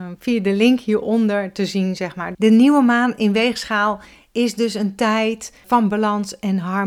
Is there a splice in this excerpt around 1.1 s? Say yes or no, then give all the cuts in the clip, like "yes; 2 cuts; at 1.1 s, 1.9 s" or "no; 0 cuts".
no; 2 cuts; at 2.3 s, 5.6 s